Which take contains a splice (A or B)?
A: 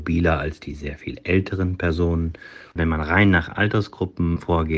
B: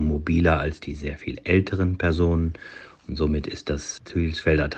A